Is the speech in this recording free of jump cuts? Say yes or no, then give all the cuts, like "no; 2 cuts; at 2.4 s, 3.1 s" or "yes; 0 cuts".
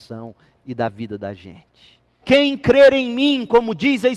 no; 1 cut; at 2.2 s